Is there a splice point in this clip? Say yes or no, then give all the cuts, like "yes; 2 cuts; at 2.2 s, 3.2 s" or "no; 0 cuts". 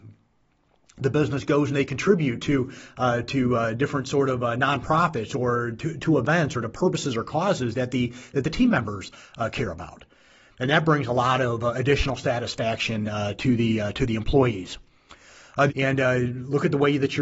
yes; 1 cut; at 15.7 s